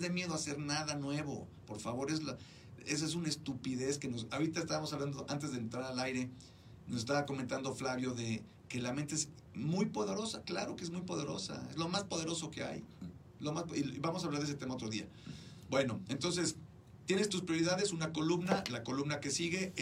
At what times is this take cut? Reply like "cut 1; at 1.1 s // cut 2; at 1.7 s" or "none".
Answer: none